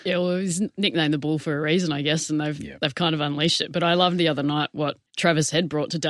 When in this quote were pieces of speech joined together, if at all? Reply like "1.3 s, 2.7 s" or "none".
5.1 s